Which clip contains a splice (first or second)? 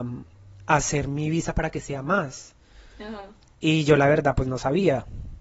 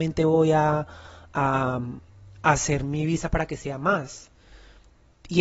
first